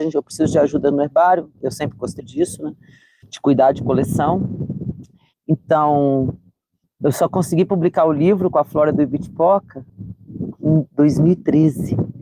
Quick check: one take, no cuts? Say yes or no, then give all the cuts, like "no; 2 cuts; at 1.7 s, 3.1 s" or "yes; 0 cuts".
no; 2 cuts; at 2.2 s, 5.3 s